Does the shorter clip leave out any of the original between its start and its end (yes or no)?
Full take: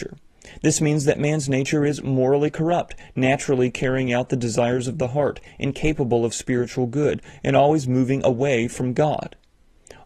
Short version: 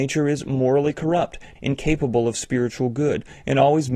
yes